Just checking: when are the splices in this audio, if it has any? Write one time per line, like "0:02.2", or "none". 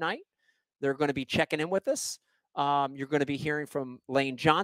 none